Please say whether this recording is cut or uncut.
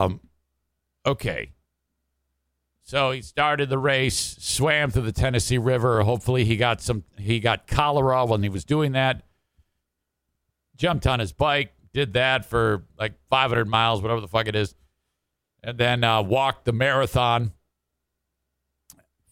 uncut